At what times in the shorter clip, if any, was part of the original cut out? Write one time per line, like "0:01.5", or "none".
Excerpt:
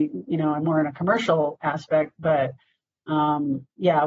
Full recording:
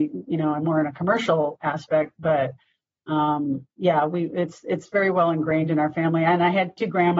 none

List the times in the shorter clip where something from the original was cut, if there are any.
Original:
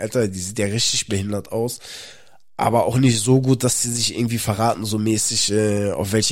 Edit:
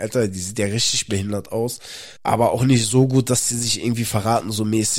0:02.2

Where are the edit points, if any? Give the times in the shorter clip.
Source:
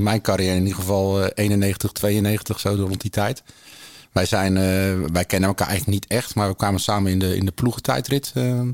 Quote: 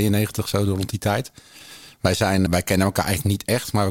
0:02.5

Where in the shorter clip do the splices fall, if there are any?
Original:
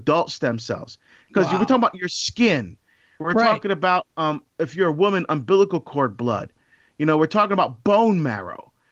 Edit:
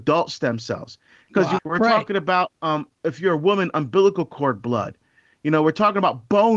0:01.6

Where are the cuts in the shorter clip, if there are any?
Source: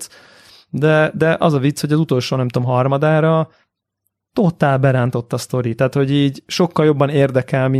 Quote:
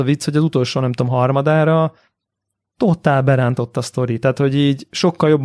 none

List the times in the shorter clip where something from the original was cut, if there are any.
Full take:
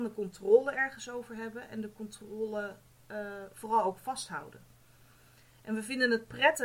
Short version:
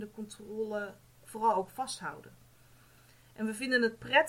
0:01.2

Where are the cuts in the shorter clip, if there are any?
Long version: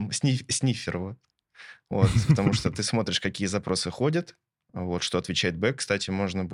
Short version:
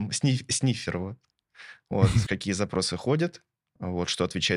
0:02.3

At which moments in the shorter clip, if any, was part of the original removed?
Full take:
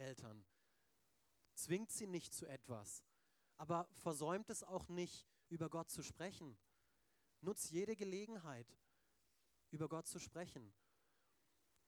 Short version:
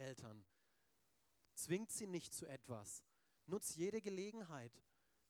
0:03.4

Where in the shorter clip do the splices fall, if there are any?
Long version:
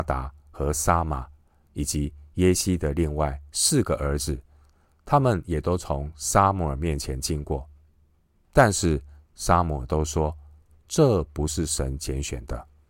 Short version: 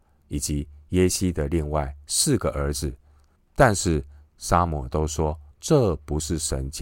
0:03.4
0:05.5

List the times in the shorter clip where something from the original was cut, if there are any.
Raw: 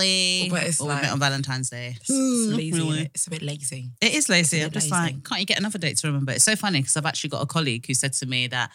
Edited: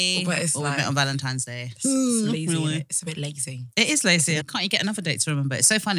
0:04.4

